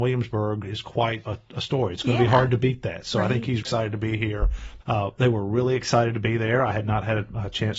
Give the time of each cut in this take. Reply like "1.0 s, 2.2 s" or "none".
1.2 s, 3.6 s, 4.8 s